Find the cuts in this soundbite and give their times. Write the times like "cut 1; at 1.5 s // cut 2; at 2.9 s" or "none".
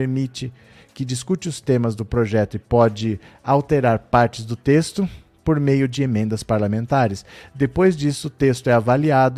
none